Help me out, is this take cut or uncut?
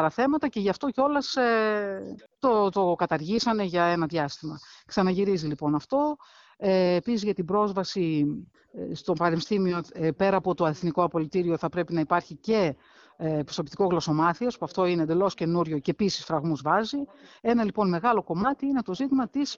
uncut